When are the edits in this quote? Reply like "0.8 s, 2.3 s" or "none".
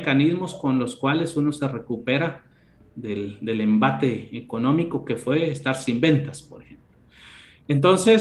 none